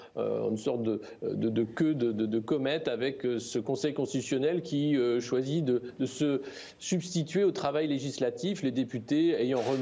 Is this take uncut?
yes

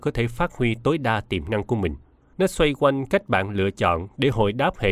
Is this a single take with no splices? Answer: no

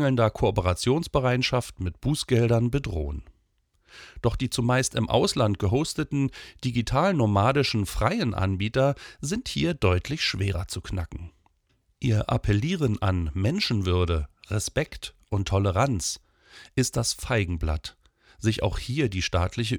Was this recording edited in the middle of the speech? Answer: yes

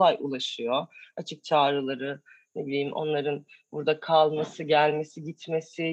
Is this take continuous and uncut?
yes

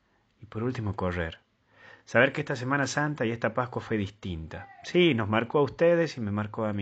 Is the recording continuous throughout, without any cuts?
yes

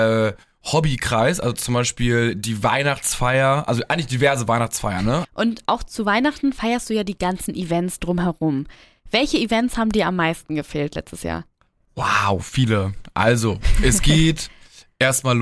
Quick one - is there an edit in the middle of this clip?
yes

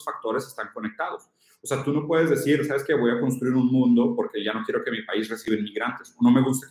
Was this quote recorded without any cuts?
yes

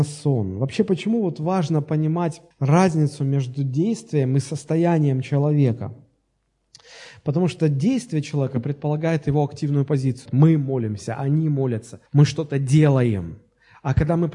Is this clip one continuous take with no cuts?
no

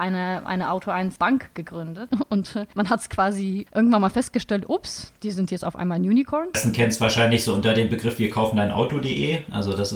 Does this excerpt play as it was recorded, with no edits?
no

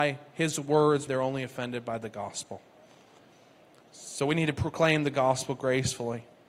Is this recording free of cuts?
no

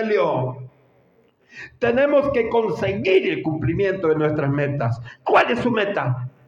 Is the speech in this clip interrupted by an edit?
no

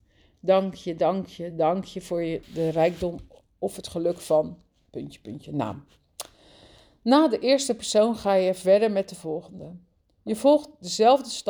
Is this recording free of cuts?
no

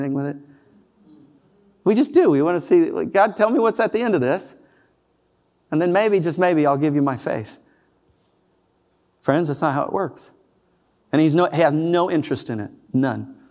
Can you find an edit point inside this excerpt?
no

